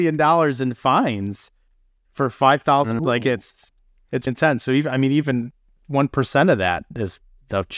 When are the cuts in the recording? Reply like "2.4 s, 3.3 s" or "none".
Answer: 3.0 s, 4.3 s